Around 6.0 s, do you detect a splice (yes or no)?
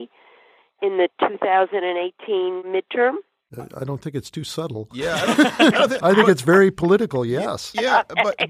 yes